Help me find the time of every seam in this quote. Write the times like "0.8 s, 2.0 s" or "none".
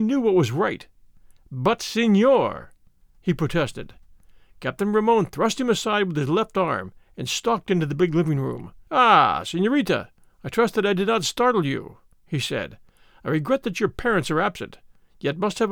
8.9 s

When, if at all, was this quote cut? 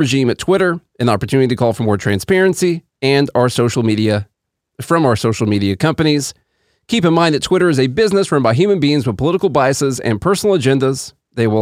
none

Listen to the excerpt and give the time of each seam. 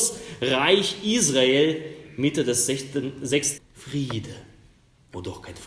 3.6 s

